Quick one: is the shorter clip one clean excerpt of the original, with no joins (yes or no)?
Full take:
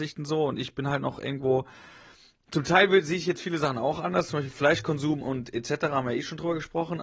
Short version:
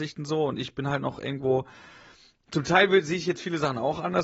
yes